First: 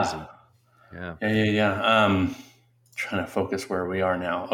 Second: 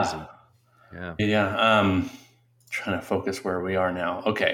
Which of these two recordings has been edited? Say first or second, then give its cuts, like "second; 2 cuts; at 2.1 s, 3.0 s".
second; 1 cut; at 1.2 s